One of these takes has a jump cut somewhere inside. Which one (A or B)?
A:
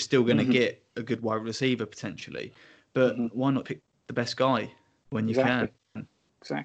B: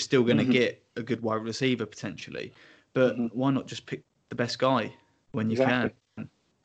A